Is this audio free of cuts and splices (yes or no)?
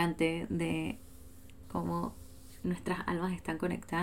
no